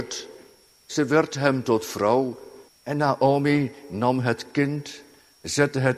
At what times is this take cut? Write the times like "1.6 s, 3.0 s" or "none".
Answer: 2.7 s

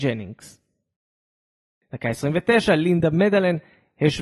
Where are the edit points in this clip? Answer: 1.8 s

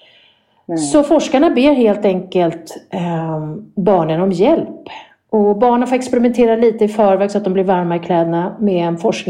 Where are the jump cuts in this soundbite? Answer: none

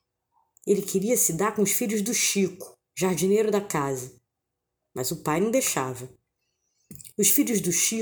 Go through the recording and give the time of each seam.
none

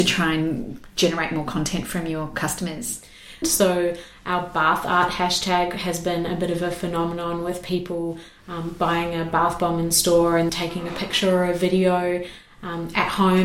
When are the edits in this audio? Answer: 3.4 s, 10.5 s

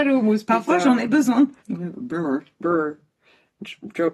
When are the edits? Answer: 1.6 s

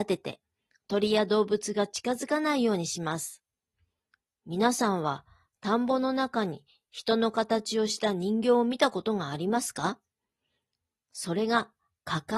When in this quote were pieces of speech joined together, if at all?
none

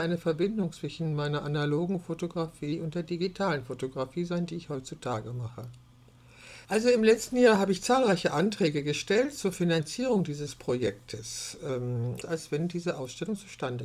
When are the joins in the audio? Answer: 6.7 s, 12.2 s

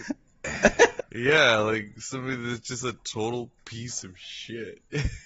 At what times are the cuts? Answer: 1.0 s

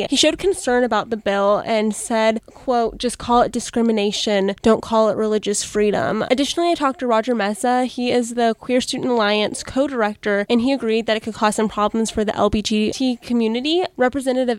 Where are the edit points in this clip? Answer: none

